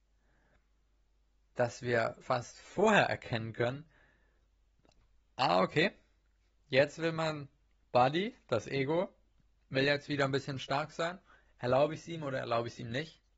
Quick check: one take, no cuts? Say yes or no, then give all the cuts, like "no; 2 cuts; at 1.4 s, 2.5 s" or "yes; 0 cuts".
no; 1 cut; at 2.2 s